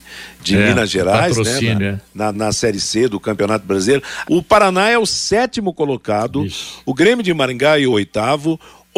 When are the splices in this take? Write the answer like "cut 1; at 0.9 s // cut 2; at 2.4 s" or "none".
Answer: cut 1; at 2.3 s // cut 2; at 4.2 s